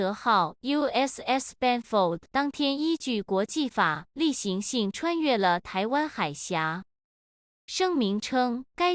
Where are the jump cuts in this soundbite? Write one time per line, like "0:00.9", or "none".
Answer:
none

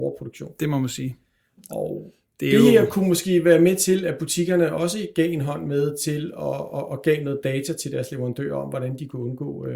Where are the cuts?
none

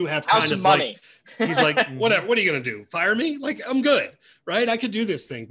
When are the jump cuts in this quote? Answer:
none

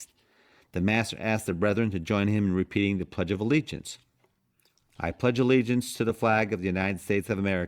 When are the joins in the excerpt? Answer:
none

